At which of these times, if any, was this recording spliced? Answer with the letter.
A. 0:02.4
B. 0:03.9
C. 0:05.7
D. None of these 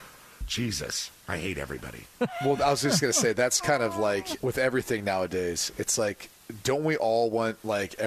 D